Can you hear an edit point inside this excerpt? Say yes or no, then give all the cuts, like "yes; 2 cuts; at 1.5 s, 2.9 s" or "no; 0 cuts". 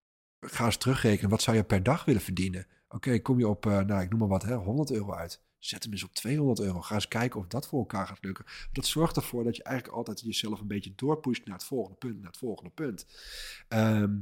no; 0 cuts